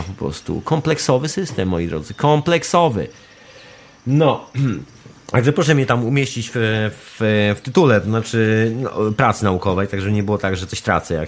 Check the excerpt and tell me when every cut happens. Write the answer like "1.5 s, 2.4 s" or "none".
none